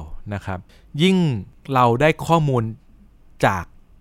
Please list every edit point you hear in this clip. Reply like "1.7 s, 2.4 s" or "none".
none